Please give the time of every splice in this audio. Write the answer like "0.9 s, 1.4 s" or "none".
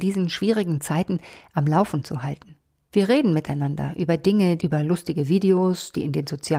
2.9 s, 4.6 s